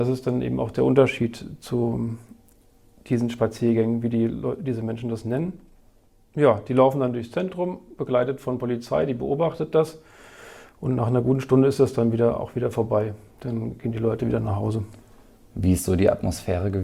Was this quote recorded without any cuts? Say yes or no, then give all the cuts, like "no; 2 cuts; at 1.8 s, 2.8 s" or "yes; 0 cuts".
yes; 0 cuts